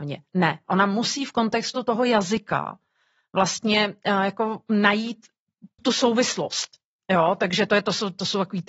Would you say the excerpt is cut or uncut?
cut